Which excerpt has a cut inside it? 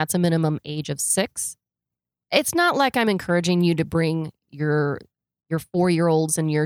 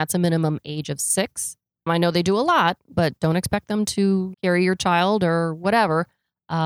second; 2 cuts; at 1.9 s, 4.3 s

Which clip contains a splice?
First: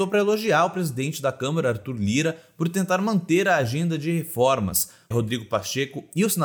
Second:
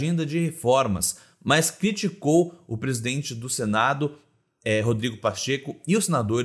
first; 1 cut; at 5.1 s

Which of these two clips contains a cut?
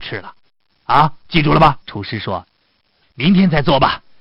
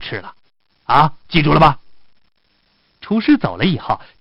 first; 2 cuts; at 1.8 s, 3.0 s

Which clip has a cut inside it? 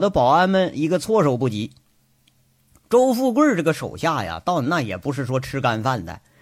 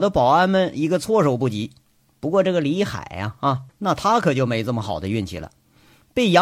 second; 2 cuts; at 2.1 s, 3.7 s

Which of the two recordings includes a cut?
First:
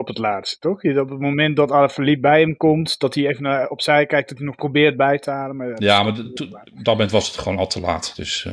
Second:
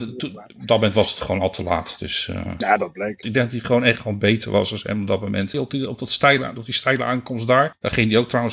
second; 2 cuts; at 3.2 s, 5.5 s

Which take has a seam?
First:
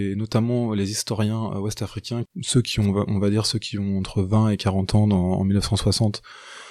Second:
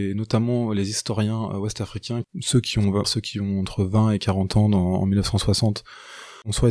second; 1 cut; at 3.0 s

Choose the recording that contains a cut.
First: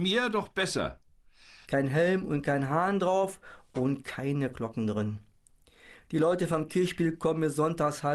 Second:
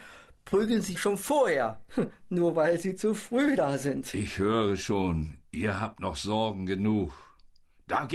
first; 1 cut; at 1.6 s

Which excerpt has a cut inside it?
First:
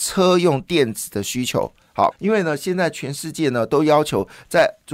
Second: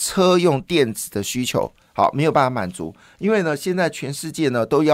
first; 1 cut; at 2.1 s

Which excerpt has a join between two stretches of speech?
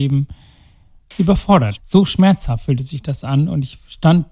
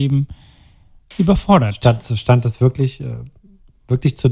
first; 1 cut; at 1.8 s

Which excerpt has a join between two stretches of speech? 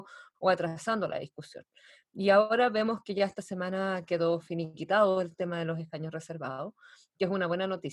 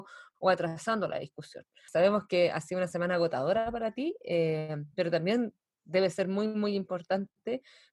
second; 1 cut; at 1.9 s

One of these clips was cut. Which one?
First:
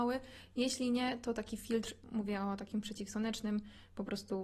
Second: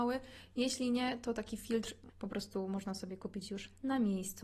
second; 1 cut; at 2.1 s

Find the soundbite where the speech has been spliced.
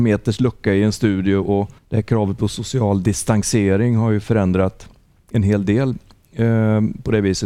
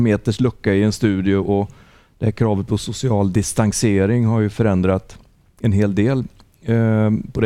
first; 1 cut; at 1.8 s

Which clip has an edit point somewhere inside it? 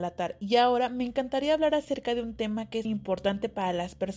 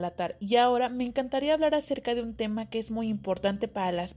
first; 1 cut; at 2.8 s

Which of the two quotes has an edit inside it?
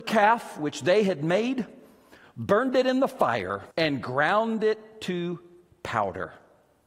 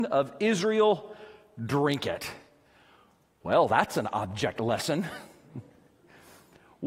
first; 1 cut; at 3.7 s

